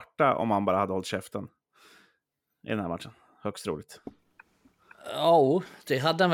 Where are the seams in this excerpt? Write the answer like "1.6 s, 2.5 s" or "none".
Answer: none